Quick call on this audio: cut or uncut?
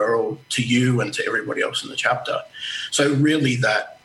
uncut